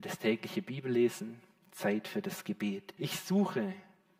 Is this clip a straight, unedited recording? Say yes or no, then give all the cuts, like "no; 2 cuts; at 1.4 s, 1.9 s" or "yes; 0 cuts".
no; 1 cut; at 3.0 s